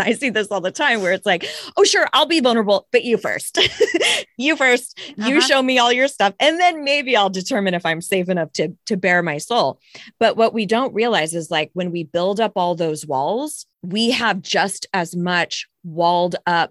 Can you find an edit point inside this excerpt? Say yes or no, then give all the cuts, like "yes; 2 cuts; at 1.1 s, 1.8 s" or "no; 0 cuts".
yes; 1 cut; at 13.7 s